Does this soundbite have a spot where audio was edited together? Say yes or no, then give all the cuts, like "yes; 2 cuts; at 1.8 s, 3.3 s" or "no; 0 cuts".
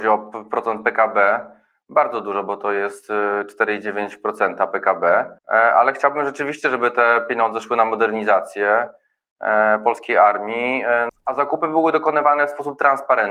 yes; 2 cuts; at 5.4 s, 11.1 s